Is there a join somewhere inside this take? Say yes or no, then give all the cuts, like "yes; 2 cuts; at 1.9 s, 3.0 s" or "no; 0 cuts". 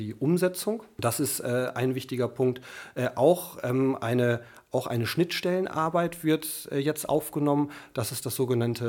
no; 0 cuts